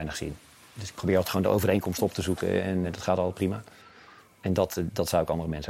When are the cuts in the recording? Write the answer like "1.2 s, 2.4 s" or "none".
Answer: 2.8 s